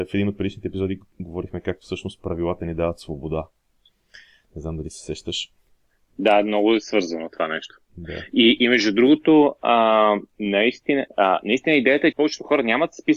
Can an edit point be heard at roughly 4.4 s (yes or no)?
no